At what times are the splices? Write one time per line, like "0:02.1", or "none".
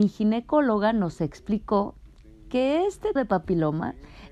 0:03.2